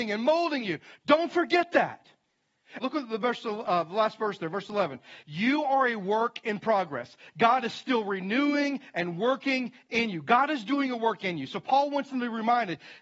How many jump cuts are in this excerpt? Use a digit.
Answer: 2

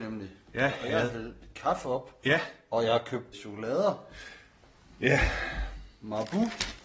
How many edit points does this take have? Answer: 1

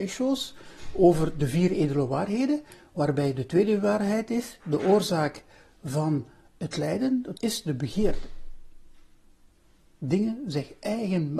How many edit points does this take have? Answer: 1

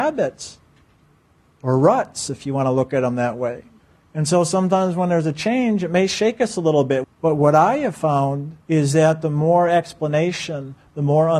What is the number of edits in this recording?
2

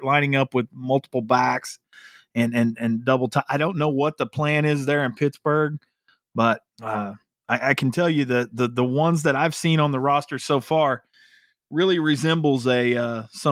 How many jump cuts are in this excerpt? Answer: 1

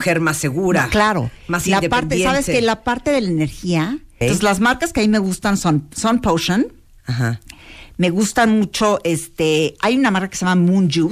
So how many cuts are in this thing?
1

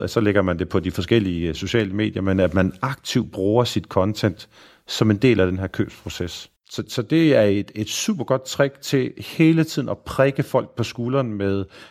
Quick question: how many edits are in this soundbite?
1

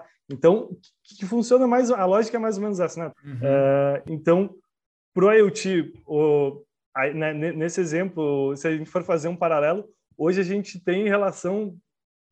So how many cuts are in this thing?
1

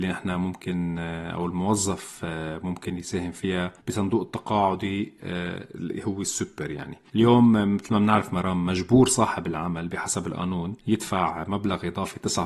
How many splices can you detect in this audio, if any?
2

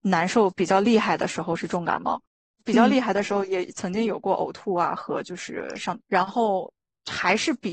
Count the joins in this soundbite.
2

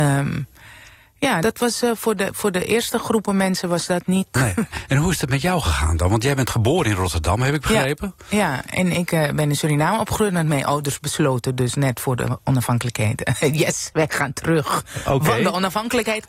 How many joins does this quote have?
2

